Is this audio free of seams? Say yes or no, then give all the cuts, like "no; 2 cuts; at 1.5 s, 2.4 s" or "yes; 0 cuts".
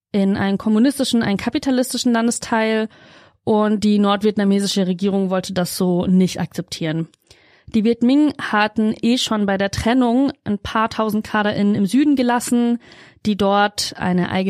yes; 0 cuts